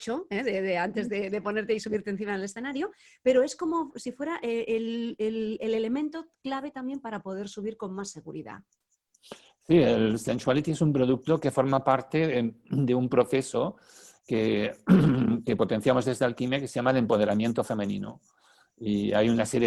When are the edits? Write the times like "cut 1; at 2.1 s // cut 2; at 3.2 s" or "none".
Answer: none